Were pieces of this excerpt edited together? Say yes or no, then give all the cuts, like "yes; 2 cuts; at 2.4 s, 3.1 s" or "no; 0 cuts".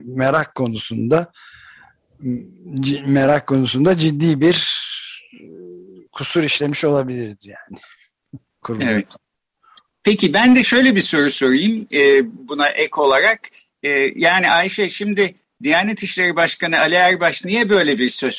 no; 0 cuts